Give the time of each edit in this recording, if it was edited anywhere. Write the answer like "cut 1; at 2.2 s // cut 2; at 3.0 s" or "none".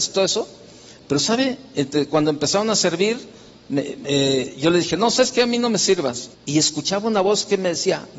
cut 1; at 6.3 s